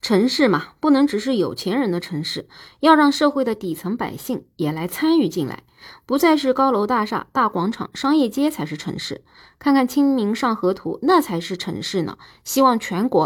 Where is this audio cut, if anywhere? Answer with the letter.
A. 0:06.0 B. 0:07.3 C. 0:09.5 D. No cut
D